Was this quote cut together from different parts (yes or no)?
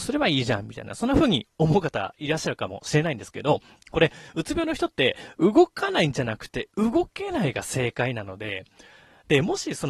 no